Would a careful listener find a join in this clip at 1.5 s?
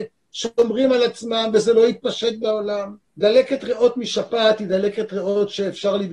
no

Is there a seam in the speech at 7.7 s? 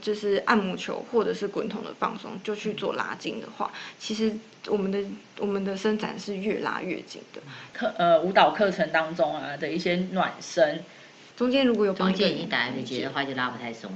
yes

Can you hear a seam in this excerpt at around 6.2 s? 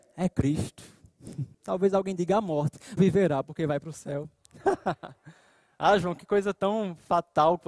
no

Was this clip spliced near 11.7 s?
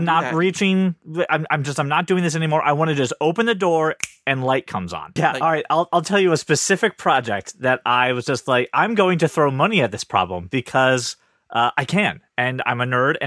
no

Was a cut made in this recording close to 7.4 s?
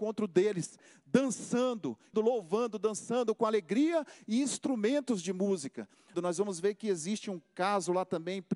no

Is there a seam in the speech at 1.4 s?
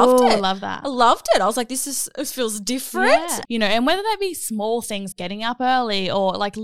no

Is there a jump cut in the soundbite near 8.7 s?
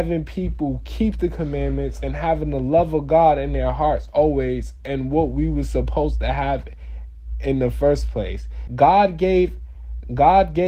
yes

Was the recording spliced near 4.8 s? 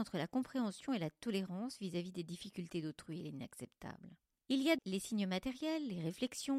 yes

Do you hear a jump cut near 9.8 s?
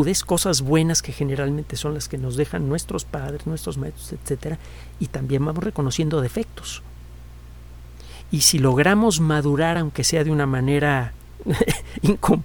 no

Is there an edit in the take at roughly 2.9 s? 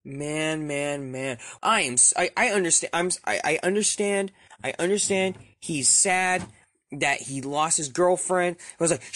no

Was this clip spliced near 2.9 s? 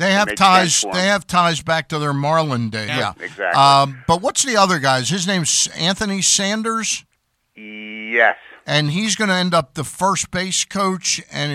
yes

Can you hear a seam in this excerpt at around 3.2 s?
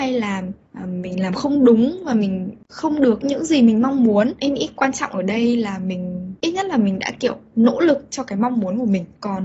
yes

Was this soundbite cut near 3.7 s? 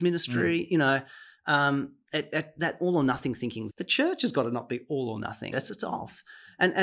yes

